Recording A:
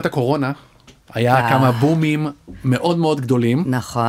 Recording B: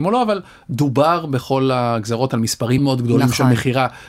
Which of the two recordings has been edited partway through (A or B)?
B